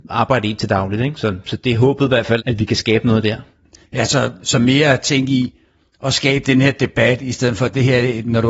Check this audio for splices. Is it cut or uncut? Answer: cut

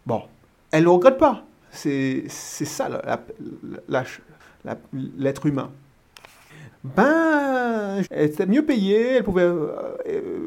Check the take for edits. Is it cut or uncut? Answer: cut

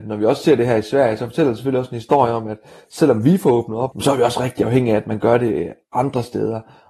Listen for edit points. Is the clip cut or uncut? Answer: cut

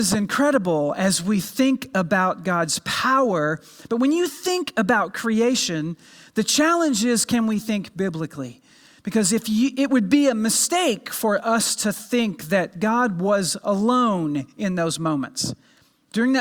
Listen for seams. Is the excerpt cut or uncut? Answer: uncut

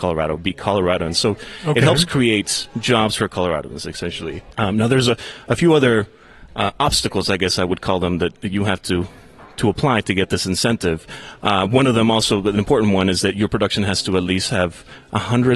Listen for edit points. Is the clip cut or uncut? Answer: uncut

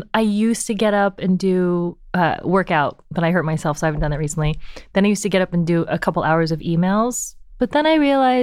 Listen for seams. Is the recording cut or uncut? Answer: uncut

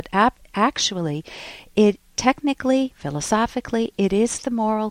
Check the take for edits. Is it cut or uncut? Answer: cut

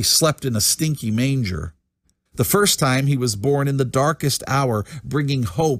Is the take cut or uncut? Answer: cut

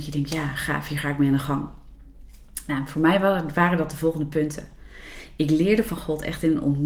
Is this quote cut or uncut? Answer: uncut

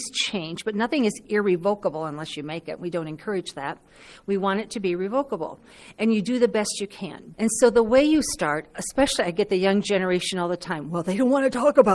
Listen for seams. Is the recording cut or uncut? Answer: cut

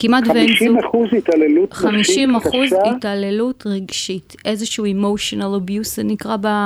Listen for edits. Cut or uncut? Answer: uncut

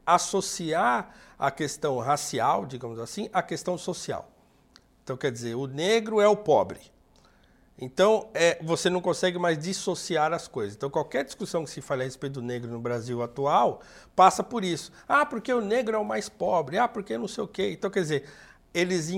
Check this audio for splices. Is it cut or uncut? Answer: uncut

